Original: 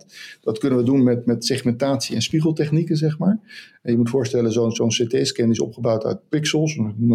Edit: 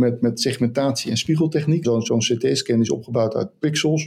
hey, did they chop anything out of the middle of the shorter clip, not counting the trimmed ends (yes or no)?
yes